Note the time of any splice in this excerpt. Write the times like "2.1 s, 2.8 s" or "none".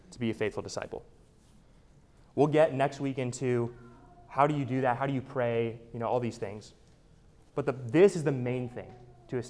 none